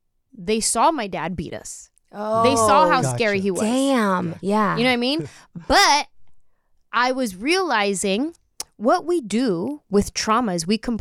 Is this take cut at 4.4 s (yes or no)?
yes